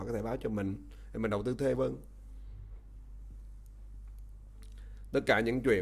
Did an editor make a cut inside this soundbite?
yes; 1 cut; at 1.7 s

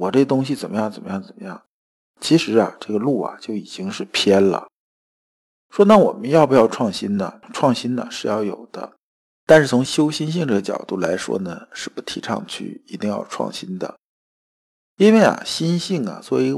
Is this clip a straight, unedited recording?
yes; 0 cuts

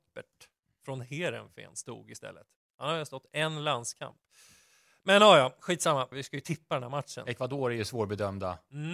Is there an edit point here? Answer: yes; 1 cut; at 6.1 s

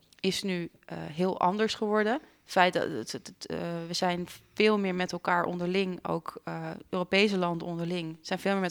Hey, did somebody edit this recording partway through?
no; 0 cuts

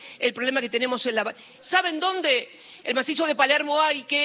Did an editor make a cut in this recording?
yes; 2 cuts; at 1.6 s, 2.8 s

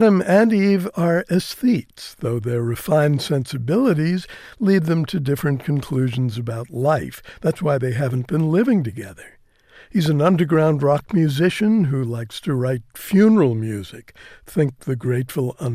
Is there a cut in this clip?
no; 0 cuts

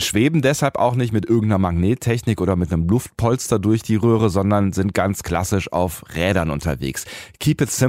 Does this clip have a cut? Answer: no; 0 cuts

